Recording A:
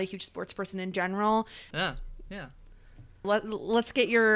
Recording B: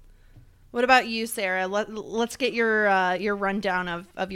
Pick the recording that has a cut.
A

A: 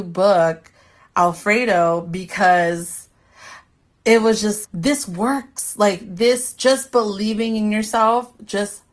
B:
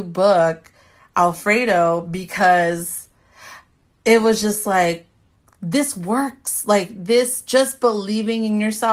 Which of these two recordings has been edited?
A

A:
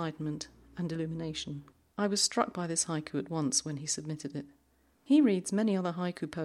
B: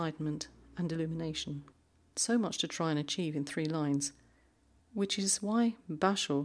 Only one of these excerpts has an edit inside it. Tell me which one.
A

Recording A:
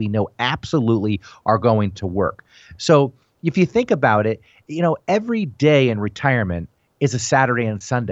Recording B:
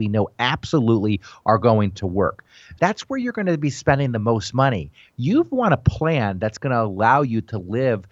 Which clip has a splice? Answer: B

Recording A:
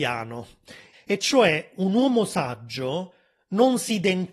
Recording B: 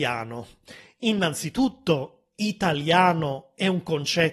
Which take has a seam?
A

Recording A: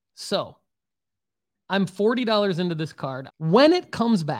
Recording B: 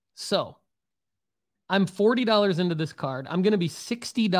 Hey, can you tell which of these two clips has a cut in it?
A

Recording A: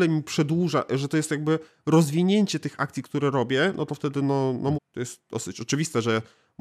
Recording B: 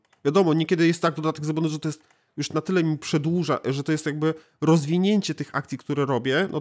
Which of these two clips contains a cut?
A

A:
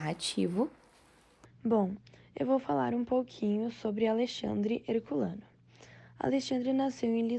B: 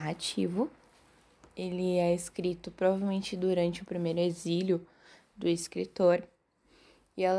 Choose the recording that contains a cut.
A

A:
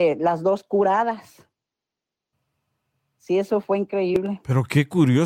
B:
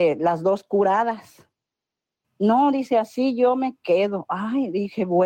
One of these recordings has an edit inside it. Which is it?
B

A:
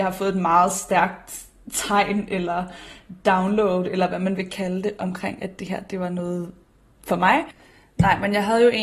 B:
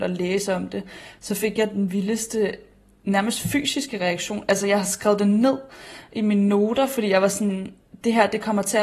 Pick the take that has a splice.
A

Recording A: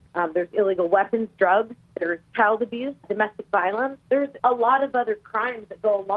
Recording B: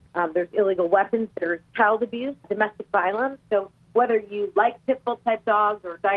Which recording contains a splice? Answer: B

